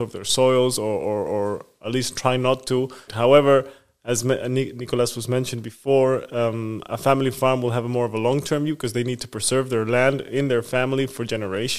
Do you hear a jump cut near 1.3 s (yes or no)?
no